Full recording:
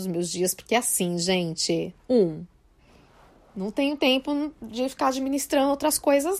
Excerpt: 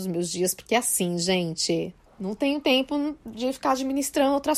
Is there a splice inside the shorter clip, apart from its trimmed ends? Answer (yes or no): yes